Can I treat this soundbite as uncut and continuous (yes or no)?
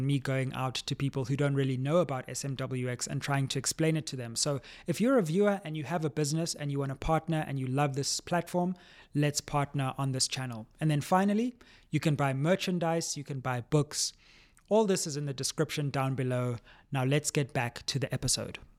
yes